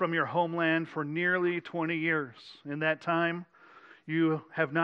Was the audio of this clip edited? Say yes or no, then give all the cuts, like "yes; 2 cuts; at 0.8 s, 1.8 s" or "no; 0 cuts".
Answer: no; 0 cuts